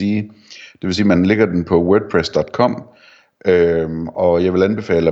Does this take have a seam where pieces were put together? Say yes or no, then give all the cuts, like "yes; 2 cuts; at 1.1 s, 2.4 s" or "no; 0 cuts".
no; 0 cuts